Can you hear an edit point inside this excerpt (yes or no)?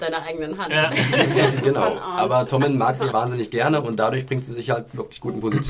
yes